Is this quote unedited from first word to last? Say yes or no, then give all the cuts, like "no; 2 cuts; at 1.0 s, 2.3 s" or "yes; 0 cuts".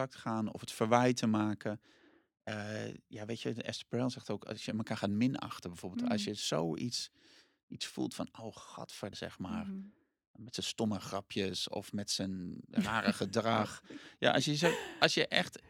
no; 1 cut; at 9.1 s